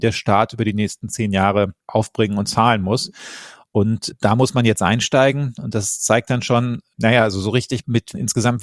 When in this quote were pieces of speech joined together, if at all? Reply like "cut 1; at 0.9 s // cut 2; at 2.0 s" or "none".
none